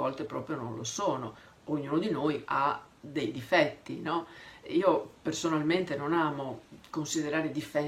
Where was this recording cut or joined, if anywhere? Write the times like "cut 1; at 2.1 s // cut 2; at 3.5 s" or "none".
cut 1; at 2.5 s